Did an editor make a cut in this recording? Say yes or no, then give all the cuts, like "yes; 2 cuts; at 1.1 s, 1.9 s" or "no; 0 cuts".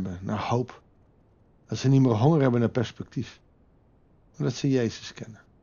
no; 0 cuts